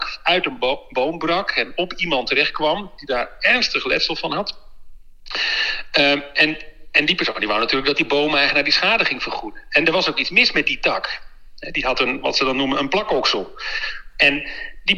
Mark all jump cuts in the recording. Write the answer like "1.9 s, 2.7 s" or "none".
none